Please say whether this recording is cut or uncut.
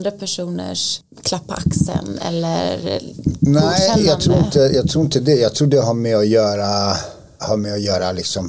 cut